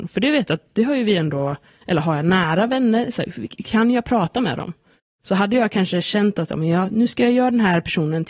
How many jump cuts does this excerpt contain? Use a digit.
1